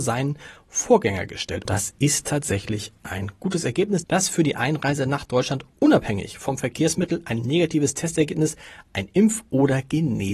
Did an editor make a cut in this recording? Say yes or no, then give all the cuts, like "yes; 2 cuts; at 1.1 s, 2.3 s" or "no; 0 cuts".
yes; 2 cuts; at 1.7 s, 4.0 s